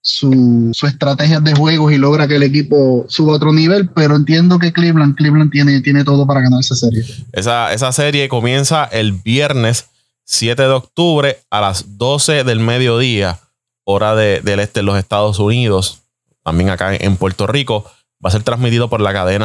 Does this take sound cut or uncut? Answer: uncut